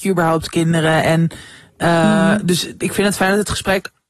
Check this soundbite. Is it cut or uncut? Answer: uncut